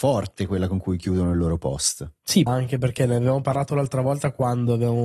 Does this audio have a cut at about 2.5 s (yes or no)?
yes